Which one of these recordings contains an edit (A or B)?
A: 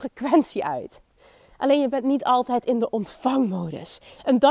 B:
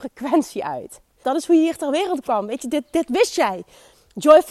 B